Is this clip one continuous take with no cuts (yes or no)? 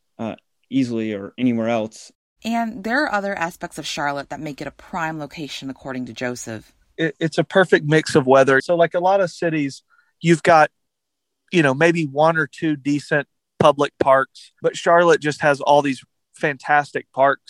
no